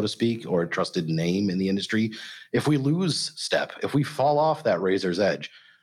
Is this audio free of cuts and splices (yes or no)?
yes